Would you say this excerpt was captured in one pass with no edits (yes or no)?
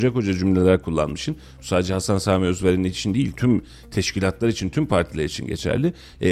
yes